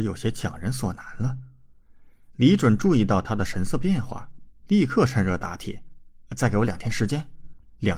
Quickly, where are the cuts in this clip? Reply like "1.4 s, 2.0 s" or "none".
none